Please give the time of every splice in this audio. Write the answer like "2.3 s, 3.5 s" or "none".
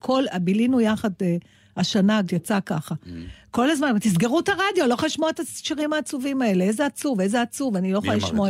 2.3 s